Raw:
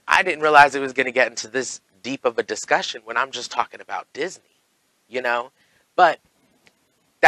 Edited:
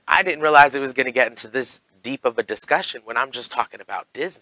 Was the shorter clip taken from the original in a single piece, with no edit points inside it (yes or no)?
yes